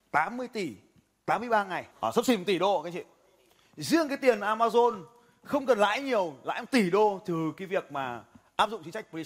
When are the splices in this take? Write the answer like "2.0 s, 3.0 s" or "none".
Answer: 1.9 s